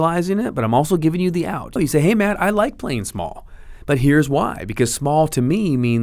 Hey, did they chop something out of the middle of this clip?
yes; 1 cut; at 1.8 s

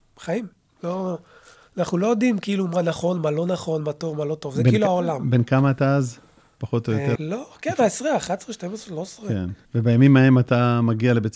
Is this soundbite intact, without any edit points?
no; 2 cuts; at 7.2 s, 9.7 s

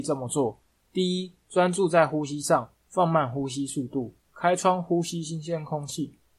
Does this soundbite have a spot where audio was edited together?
yes; 1 cut; at 4.2 s

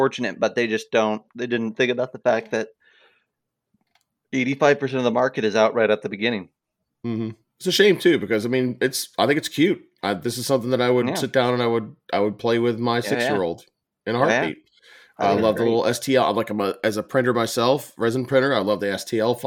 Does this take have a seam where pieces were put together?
no; 0 cuts

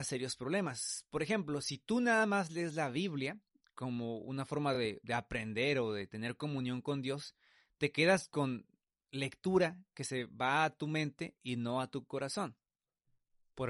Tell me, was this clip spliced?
no; 0 cuts

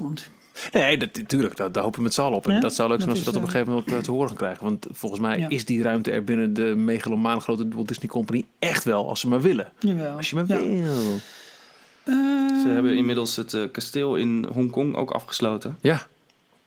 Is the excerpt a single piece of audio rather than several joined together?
yes; 0 cuts

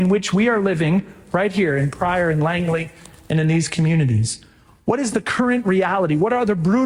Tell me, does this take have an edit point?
no; 0 cuts

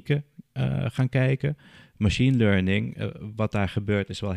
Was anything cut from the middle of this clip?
no; 0 cuts

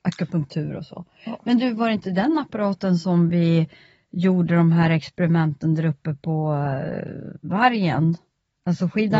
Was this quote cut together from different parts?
no; 0 cuts

